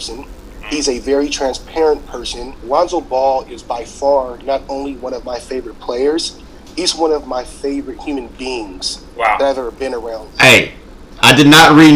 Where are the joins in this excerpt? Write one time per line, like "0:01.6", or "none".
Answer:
0:02.6
0:10.3